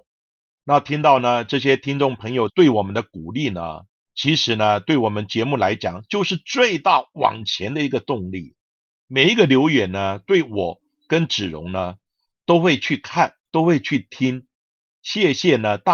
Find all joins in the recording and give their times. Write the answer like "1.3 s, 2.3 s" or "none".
none

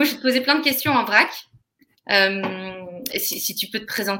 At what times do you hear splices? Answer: 2.0 s, 3.1 s

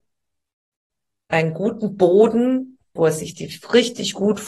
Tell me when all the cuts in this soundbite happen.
3.0 s

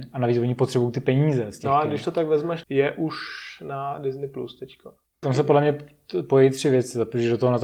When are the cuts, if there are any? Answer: 2.6 s

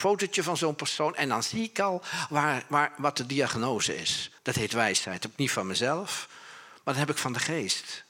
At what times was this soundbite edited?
4.4 s

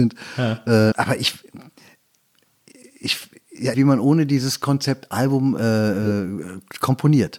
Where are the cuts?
0.9 s, 3.7 s

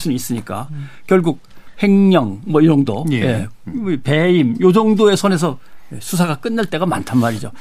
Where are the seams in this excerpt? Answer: none

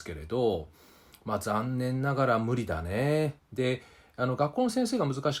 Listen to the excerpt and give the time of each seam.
3.4 s

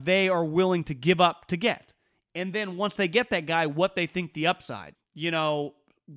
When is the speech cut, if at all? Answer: 4.9 s

